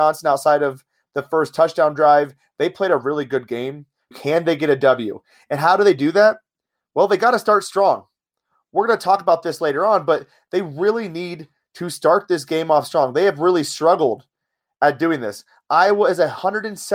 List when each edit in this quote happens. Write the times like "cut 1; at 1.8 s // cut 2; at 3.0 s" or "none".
cut 1; at 4.1 s